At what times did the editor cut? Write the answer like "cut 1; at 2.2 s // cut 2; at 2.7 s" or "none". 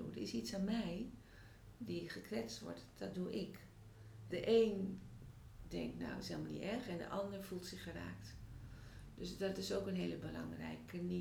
cut 1; at 4.3 s

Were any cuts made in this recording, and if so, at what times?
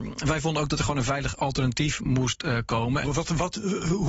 cut 1; at 3.0 s

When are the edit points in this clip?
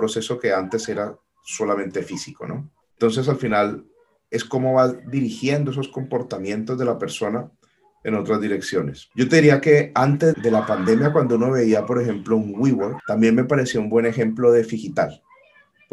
cut 1; at 10.3 s

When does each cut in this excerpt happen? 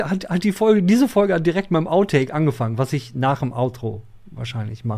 none

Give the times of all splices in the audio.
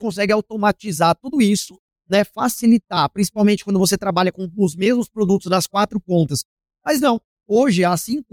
cut 1; at 6.7 s

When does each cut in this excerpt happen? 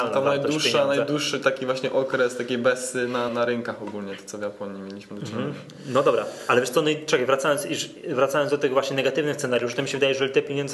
cut 1; at 3.3 s

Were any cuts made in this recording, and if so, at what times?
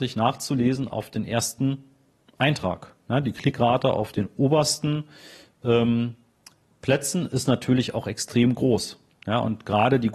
none

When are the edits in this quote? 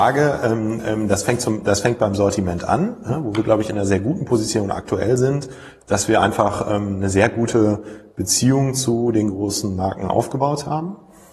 none

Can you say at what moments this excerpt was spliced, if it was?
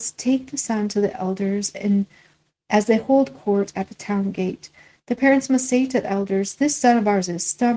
none

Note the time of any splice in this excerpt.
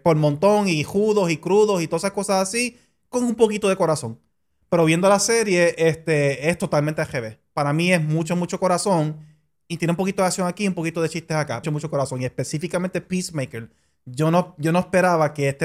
cut 1; at 11.6 s

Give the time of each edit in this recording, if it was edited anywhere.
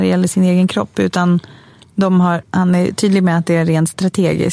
cut 1; at 2.4 s

